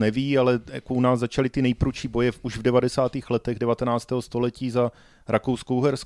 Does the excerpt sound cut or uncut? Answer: uncut